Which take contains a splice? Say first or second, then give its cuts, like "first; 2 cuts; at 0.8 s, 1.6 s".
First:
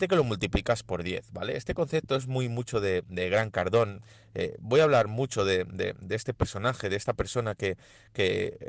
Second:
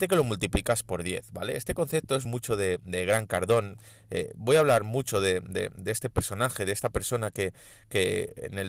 second; 1 cut; at 2.3 s